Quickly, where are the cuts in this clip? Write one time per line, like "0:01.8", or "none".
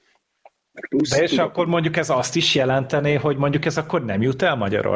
none